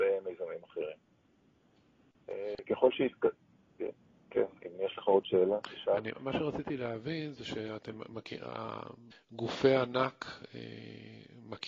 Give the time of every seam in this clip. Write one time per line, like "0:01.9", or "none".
0:06.1
0:09.1